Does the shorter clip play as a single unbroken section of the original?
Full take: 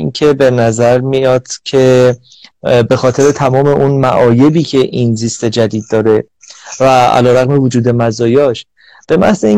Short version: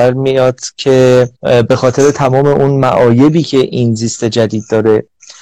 no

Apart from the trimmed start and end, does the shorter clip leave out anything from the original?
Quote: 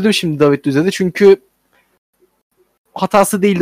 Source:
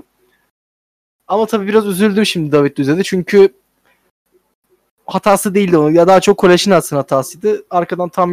no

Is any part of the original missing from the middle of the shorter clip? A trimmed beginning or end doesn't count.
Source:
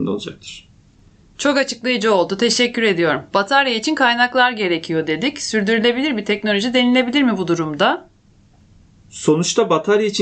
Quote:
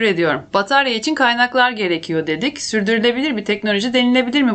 no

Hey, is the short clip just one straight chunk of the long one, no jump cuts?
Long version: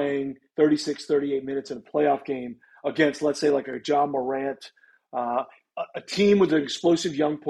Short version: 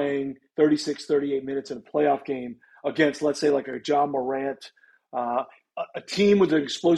yes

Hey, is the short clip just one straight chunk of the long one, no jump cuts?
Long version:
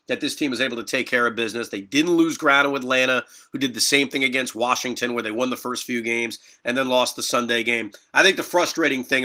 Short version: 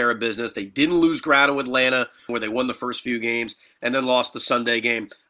no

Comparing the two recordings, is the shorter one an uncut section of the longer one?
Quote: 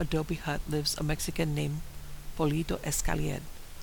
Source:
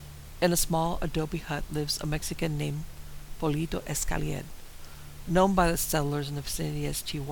yes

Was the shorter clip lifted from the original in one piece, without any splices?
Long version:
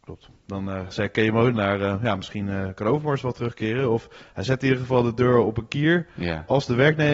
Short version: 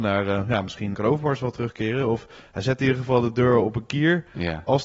no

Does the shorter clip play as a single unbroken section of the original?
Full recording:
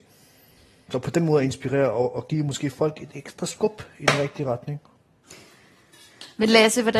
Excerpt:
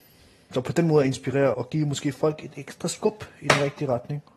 no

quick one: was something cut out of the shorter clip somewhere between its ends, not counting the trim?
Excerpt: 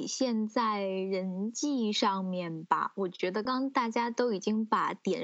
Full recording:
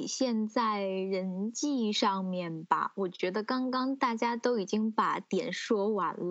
yes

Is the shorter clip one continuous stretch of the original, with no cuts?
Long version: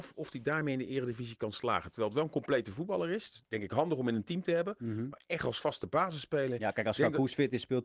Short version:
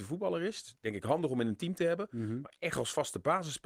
yes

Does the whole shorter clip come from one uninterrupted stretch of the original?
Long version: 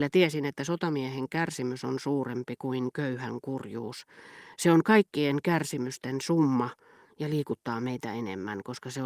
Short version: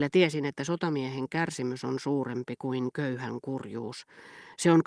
yes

